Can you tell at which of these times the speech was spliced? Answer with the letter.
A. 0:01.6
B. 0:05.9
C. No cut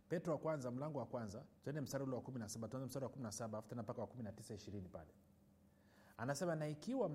A